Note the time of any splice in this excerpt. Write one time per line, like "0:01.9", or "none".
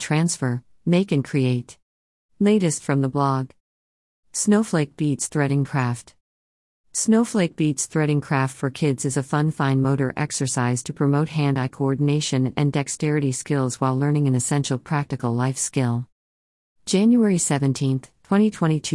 0:02.2